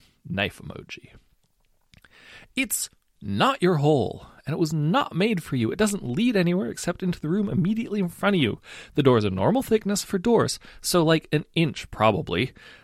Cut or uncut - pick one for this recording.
uncut